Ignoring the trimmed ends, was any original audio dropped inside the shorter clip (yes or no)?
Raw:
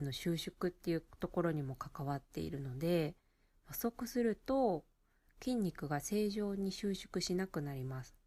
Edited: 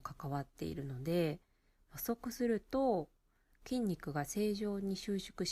no